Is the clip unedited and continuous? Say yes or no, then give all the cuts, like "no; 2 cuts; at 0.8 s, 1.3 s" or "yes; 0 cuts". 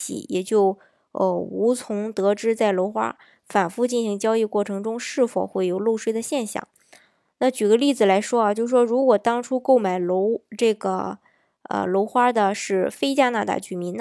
yes; 0 cuts